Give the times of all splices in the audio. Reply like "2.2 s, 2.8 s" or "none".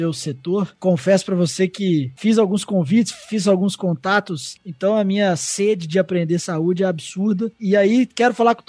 4.6 s